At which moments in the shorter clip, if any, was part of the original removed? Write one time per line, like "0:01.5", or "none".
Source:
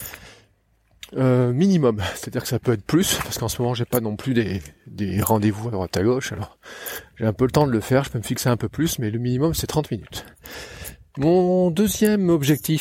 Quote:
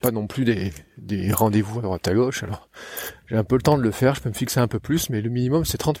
none